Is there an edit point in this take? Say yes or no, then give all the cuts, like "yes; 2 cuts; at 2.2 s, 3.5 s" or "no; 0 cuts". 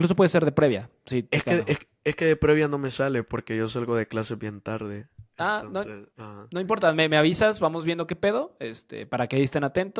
no; 0 cuts